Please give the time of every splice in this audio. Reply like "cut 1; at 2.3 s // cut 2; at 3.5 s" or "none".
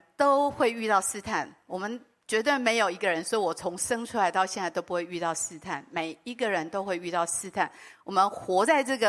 none